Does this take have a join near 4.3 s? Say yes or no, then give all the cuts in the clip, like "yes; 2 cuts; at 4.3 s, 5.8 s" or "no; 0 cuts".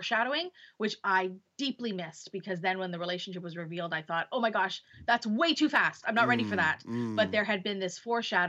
no; 1 cut; at 6.0 s